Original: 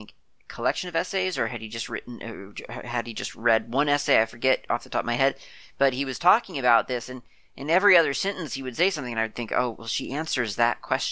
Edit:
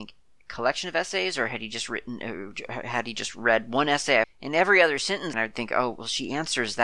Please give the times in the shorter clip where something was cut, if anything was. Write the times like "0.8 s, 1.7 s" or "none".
4.2 s, 5.3 s